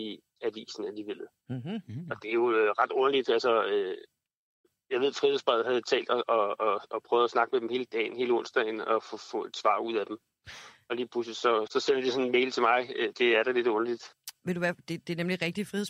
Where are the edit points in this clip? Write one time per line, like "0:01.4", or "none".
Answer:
0:11.7